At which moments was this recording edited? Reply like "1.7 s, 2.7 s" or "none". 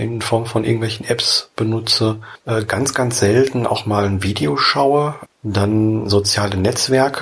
5.3 s